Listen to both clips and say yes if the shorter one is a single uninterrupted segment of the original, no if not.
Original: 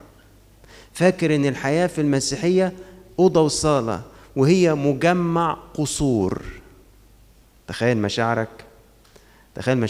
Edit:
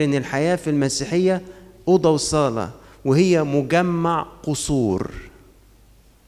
yes